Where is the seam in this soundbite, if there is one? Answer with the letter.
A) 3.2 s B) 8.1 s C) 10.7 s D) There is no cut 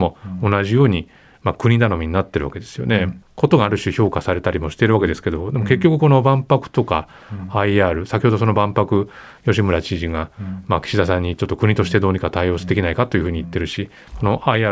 A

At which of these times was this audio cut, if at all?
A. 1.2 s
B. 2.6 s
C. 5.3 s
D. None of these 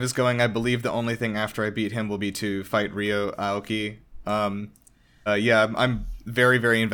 C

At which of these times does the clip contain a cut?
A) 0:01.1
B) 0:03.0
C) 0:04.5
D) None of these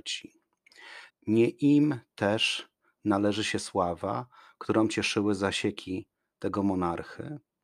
A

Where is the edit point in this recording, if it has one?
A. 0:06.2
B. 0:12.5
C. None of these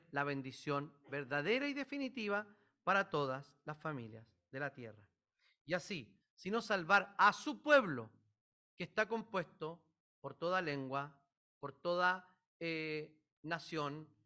A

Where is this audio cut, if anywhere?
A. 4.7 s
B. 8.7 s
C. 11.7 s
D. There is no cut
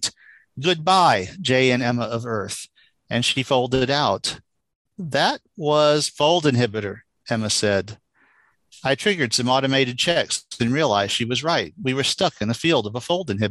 D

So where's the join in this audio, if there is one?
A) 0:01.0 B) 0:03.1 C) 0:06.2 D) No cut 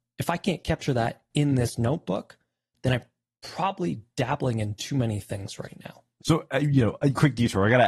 C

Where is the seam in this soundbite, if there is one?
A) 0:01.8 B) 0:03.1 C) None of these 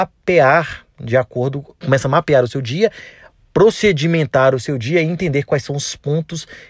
A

